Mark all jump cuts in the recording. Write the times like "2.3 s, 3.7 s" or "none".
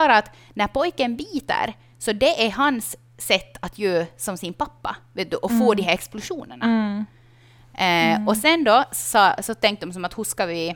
none

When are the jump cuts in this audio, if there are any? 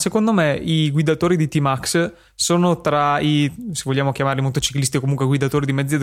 none

